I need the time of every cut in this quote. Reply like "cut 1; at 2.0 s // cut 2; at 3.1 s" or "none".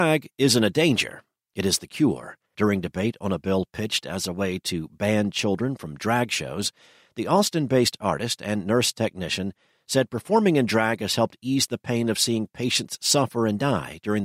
cut 1; at 2.5 s